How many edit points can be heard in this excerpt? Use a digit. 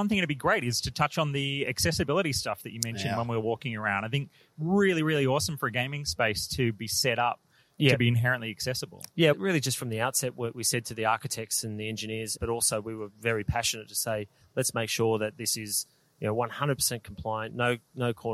2